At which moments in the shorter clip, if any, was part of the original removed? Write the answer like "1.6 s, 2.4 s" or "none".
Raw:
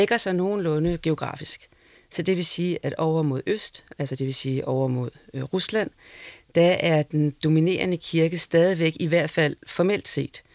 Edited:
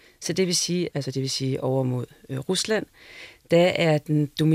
0.9 s